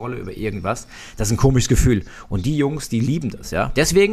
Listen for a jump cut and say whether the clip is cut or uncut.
uncut